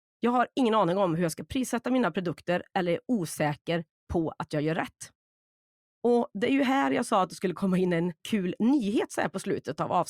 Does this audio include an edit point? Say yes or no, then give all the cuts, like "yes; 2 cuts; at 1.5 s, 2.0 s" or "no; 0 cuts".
no; 0 cuts